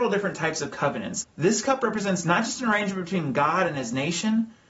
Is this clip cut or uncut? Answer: cut